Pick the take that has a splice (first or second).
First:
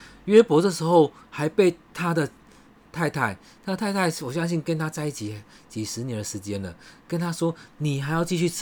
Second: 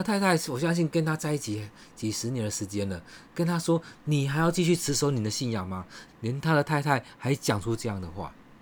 second